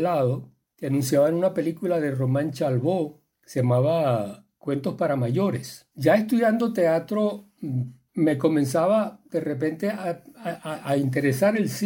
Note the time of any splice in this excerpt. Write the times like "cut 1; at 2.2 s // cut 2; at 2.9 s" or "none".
none